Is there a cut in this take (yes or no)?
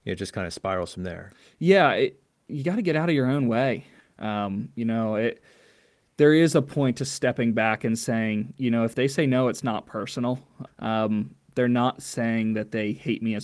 yes